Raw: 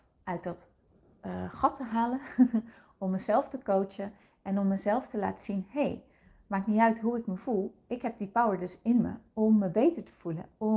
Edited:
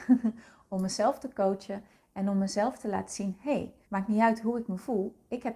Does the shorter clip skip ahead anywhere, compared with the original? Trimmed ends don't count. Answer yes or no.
yes